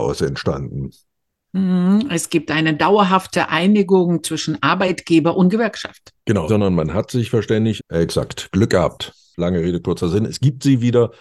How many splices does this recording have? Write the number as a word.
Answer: three